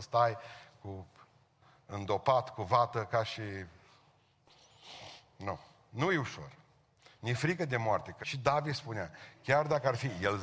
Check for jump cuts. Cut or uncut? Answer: cut